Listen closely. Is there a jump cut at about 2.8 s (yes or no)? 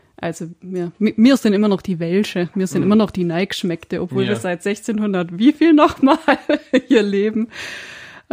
no